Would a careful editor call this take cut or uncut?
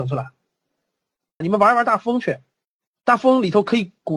cut